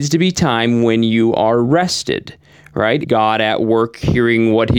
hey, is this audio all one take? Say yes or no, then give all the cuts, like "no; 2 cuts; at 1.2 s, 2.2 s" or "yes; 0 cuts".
no; 1 cut; at 3.0 s